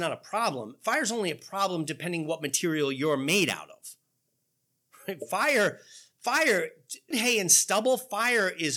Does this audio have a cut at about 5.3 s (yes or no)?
no